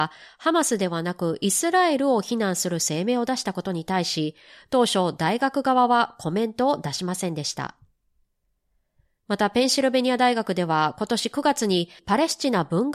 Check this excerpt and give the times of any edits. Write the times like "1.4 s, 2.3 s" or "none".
none